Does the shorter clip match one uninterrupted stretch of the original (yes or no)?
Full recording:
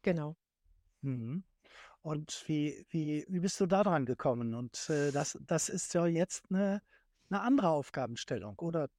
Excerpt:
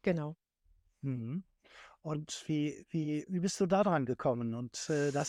yes